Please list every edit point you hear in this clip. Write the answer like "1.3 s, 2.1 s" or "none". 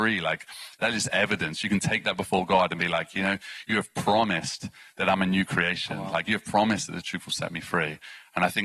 none